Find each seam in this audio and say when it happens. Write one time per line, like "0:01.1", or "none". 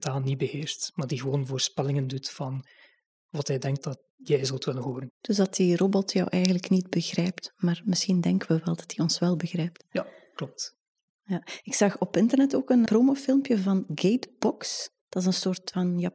0:12.9